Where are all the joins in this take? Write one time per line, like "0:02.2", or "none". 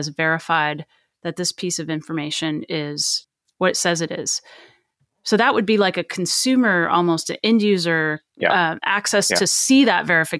0:08.3